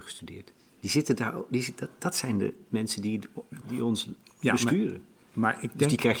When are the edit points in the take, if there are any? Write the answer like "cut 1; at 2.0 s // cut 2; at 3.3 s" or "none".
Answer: cut 1; at 3.6 s